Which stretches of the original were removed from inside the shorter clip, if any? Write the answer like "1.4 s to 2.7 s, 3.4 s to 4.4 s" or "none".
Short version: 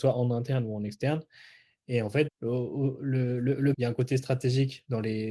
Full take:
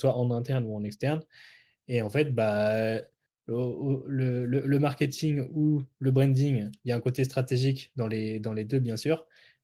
2.3 s to 3.3 s, 4.8 s to 6.8 s